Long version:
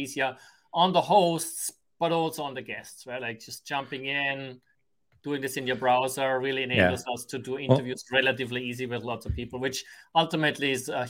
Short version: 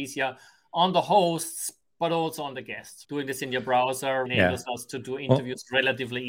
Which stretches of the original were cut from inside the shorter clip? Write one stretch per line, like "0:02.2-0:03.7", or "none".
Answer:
0:03.0-0:05.2
0:06.4-0:06.7